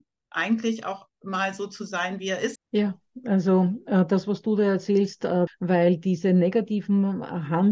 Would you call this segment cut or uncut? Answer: cut